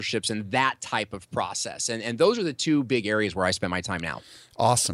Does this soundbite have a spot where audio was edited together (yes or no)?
no